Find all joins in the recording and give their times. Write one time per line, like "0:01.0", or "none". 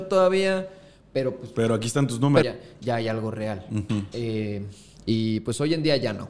0:02.4
0:04.1